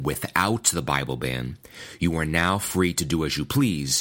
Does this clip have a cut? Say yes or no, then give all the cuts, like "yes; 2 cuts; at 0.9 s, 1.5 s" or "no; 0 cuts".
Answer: no; 0 cuts